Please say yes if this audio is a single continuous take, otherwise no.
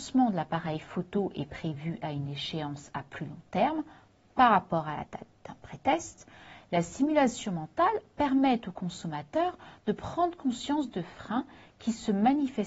yes